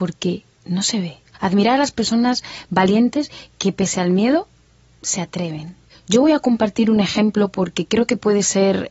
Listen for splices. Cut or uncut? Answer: cut